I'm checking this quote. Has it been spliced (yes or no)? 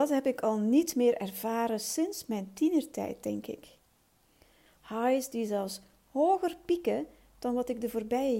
yes